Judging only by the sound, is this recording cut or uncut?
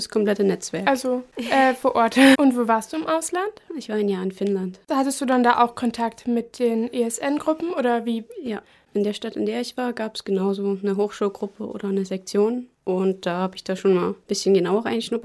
cut